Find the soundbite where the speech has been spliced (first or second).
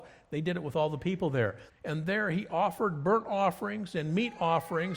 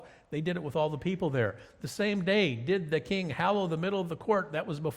first